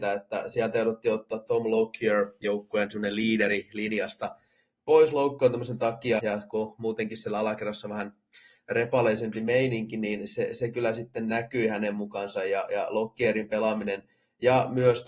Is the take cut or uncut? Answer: cut